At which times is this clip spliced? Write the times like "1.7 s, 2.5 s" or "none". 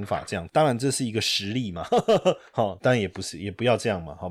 2.8 s